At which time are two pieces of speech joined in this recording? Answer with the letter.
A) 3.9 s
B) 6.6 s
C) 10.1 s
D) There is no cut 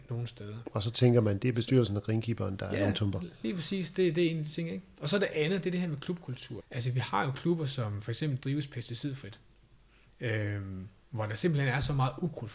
B